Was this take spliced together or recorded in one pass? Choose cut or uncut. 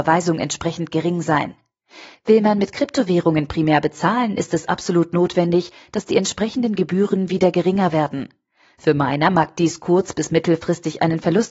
cut